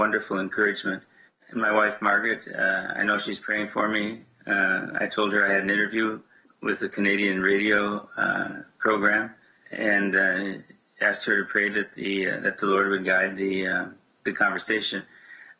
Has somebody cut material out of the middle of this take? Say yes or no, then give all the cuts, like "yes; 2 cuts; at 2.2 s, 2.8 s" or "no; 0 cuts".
no; 0 cuts